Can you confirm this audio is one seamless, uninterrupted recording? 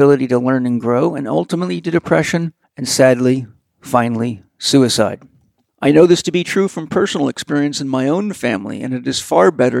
yes; 0 cuts

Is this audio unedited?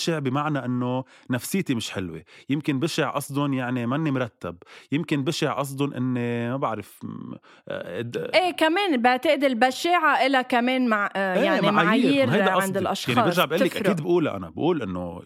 yes; 0 cuts

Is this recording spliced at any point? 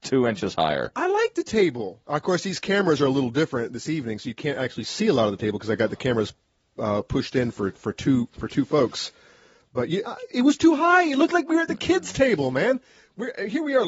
yes; 1 cut; at 10.0 s

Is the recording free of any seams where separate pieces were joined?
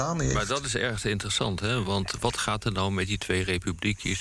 yes; 0 cuts

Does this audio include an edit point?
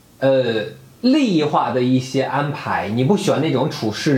no; 0 cuts

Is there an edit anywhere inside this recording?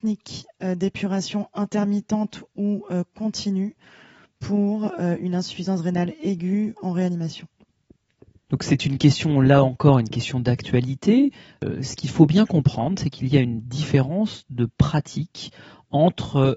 no; 0 cuts

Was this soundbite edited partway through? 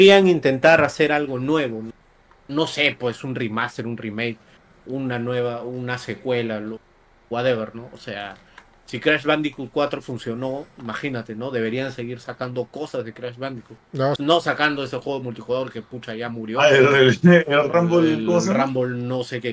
yes; 2 cuts; at 14.2 s, 17.6 s

